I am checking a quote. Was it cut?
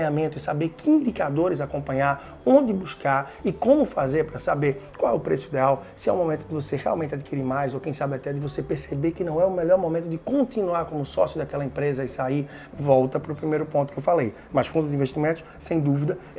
yes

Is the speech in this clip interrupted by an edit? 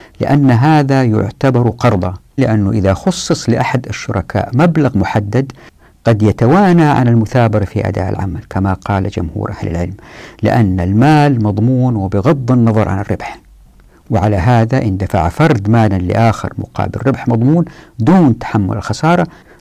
yes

